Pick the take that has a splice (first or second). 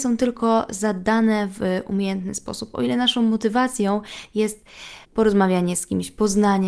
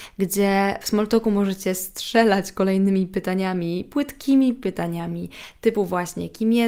first